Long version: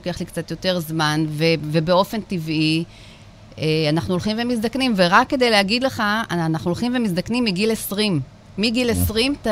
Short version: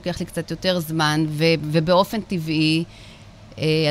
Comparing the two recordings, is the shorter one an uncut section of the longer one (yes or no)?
yes